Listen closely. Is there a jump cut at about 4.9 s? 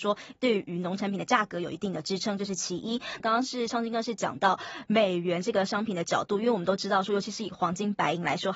no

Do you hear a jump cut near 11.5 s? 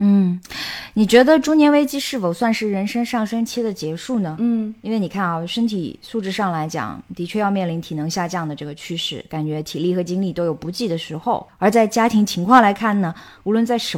yes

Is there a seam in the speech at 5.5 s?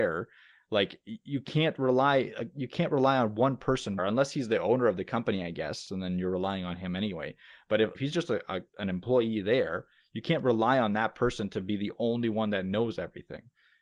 no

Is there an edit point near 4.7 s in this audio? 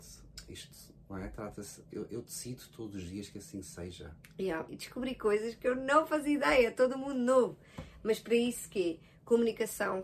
yes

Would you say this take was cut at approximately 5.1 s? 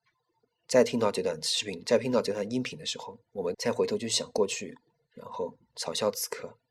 no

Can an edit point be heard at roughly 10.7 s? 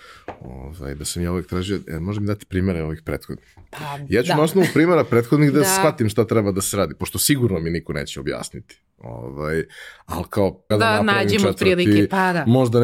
yes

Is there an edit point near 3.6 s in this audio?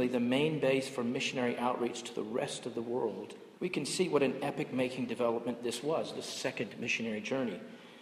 yes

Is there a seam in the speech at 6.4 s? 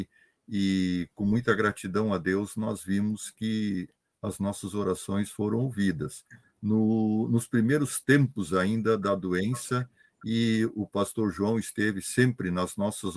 yes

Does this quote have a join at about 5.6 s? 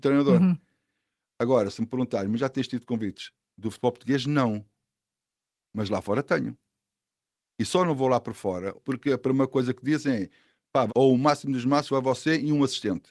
no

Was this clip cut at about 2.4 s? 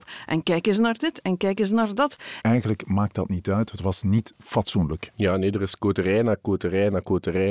yes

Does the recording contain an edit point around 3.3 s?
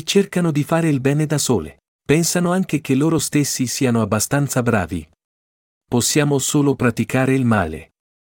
no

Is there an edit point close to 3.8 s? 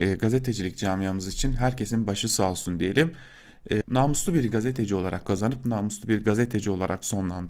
yes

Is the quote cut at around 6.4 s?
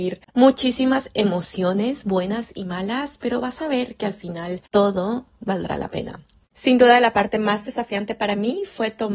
no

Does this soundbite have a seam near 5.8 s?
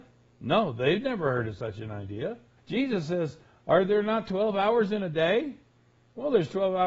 no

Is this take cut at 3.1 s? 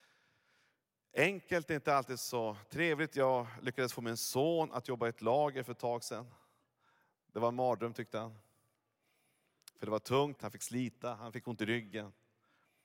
no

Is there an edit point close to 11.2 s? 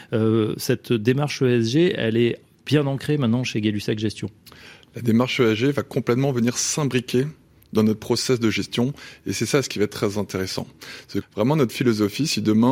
yes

